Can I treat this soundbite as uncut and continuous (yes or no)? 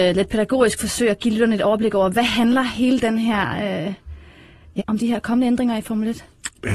no